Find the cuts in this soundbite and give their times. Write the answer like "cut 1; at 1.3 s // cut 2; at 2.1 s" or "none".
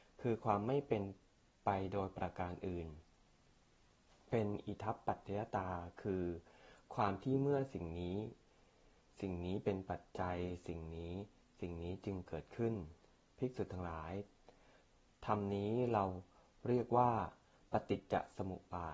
none